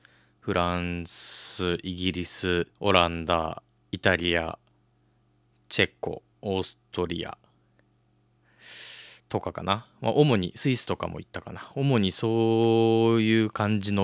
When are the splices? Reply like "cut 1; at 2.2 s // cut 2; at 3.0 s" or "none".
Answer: cut 1; at 2.7 s // cut 2; at 6.3 s